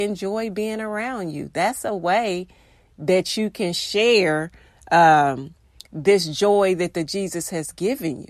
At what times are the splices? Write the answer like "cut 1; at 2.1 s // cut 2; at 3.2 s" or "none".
none